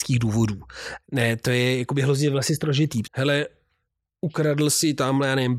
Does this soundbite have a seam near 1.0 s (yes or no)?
yes